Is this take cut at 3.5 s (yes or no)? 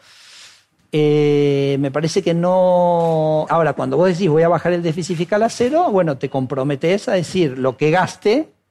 yes